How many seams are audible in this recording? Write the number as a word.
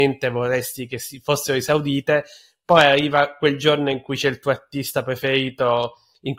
zero